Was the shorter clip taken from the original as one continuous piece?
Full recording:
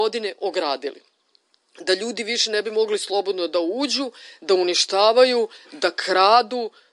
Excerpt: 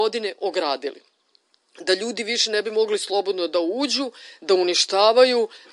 yes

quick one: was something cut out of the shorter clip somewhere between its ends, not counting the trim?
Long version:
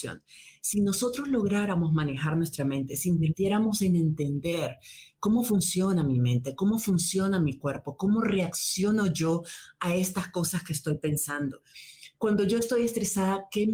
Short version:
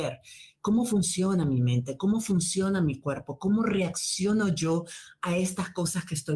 no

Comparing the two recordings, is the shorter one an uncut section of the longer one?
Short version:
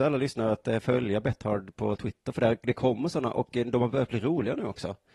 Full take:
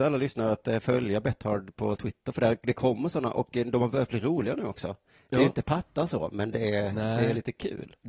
yes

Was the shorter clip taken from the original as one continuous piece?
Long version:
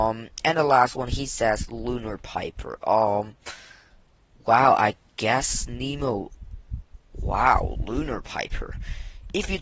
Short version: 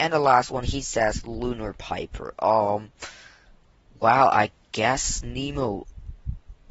yes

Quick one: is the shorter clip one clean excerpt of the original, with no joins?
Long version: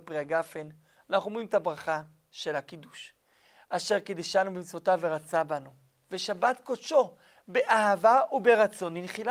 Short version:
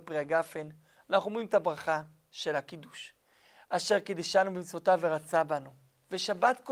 yes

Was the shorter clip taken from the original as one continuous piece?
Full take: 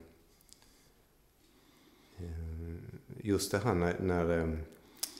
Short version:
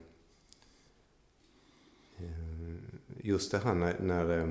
yes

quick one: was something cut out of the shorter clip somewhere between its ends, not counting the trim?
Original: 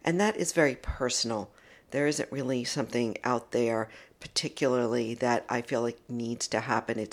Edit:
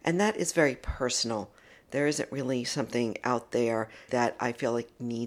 yes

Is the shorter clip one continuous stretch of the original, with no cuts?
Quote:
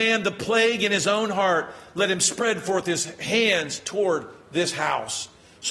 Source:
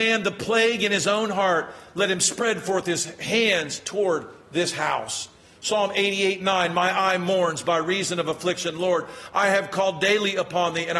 yes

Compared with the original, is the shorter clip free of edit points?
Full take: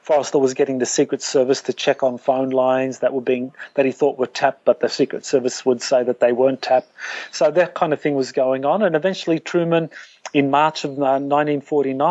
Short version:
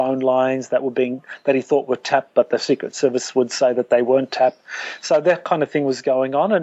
yes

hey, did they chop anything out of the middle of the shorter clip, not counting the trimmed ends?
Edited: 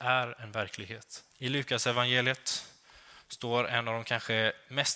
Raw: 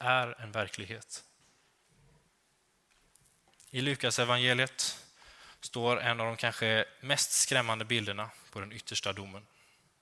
yes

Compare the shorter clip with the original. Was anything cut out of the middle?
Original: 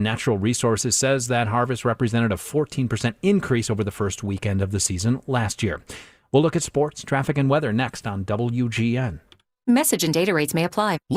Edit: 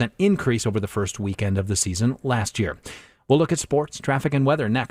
no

